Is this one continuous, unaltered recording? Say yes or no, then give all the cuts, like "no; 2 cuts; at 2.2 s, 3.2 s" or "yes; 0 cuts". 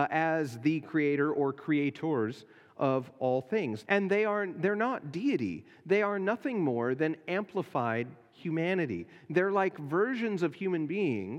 no; 1 cut; at 3.8 s